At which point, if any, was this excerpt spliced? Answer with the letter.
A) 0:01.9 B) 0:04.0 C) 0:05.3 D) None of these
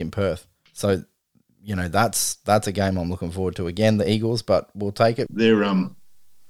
C